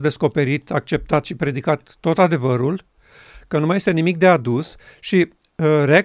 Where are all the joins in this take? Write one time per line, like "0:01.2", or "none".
none